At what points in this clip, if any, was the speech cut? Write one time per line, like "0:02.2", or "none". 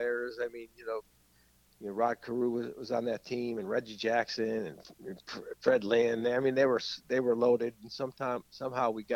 none